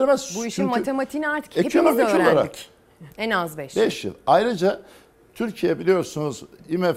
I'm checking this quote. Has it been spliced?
yes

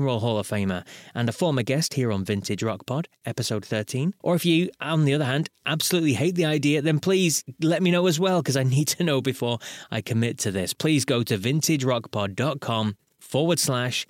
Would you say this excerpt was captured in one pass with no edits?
no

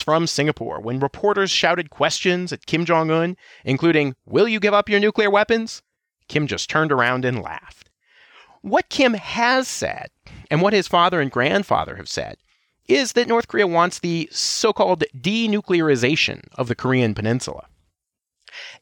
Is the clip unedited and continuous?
yes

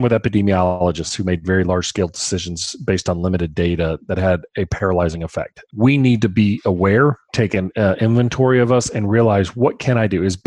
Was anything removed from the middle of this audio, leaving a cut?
yes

